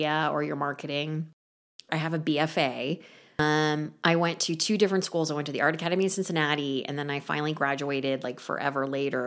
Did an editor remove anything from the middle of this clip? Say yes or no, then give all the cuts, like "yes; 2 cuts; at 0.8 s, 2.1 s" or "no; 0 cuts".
yes; 1 cut; at 1.9 s